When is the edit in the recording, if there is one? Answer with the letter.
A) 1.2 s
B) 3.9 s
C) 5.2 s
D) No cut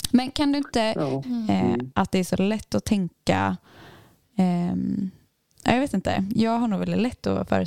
A